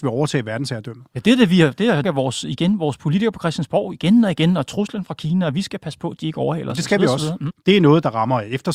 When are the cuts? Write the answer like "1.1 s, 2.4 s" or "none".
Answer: 2.0 s, 7.5 s